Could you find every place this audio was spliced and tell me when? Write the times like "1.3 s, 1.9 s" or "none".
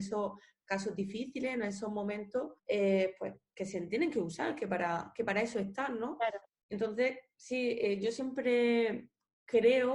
2.6 s